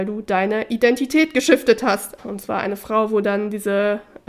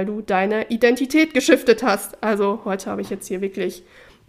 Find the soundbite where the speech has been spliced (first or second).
first